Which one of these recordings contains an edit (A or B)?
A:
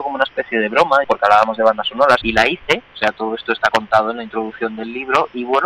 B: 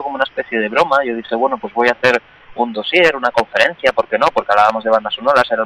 A